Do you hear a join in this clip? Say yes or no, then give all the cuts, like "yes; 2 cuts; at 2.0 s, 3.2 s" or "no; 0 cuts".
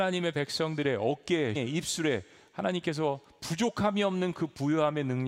yes; 1 cut; at 1.5 s